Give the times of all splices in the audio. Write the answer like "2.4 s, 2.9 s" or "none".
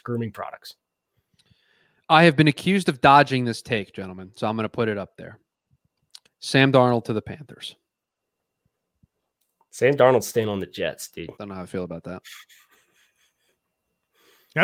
11.3 s